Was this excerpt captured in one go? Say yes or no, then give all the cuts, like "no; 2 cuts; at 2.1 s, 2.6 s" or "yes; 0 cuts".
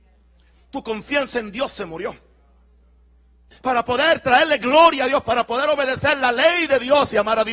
no; 1 cut; at 3.5 s